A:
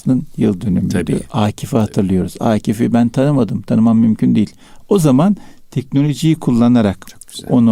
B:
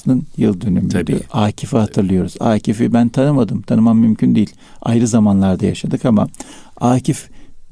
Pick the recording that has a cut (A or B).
A